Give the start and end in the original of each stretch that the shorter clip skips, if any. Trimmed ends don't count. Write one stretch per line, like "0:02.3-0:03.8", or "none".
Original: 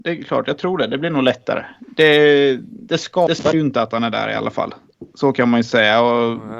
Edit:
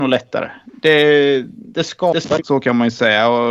0:03.5-0:05.1